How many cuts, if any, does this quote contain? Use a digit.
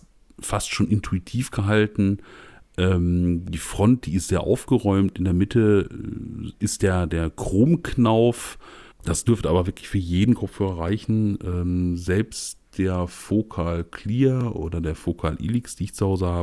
1